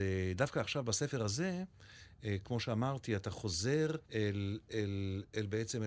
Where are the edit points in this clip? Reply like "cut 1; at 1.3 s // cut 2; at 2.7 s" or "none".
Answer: cut 1; at 4.0 s